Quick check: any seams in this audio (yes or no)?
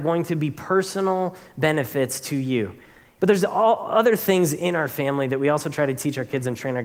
yes